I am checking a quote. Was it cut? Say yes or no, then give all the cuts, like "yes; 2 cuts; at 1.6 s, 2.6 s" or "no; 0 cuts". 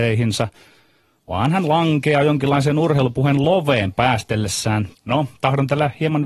yes; 1 cut; at 4.9 s